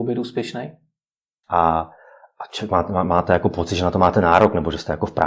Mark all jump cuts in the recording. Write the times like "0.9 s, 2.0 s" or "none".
1.4 s